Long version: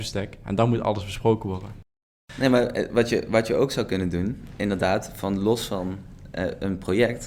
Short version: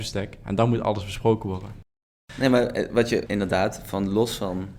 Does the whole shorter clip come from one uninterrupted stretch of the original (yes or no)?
no